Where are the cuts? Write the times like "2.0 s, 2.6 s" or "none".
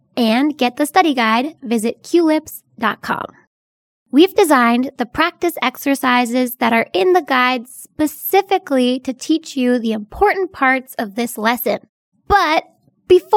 3.9 s, 12.1 s